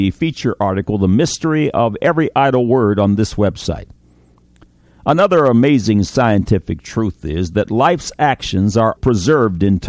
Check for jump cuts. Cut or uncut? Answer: cut